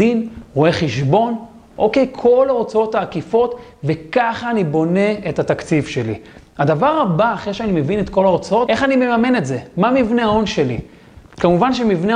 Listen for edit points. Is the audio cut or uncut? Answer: cut